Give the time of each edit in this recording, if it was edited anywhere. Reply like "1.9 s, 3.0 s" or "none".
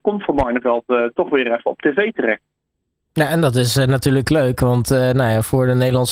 none